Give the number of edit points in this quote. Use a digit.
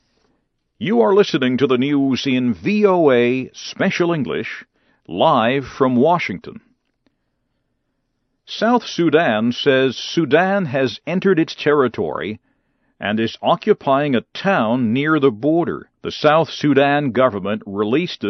1